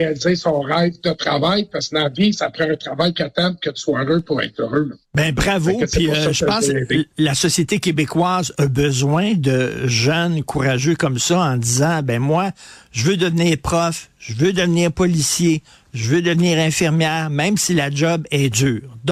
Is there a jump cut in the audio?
no; 0 cuts

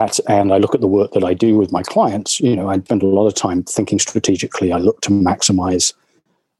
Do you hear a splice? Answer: no; 0 cuts

